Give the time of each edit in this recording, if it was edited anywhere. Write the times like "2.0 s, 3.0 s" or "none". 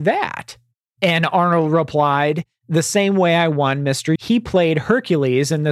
2.6 s, 4.2 s